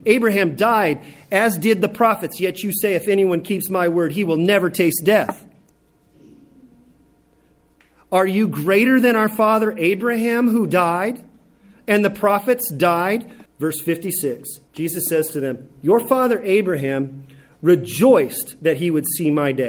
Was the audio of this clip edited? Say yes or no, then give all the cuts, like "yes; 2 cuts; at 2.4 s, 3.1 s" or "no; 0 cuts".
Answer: yes; 2 cuts; at 13.5 s, 14.7 s